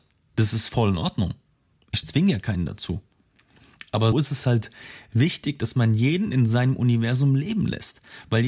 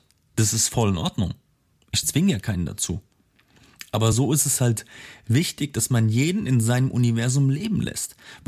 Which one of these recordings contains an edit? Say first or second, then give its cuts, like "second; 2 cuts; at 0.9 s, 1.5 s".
first; 1 cut; at 4.1 s